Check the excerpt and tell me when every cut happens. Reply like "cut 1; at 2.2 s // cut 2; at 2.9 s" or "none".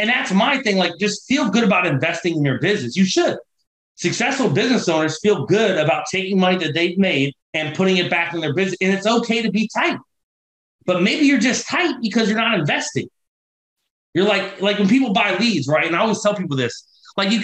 cut 1; at 7.4 s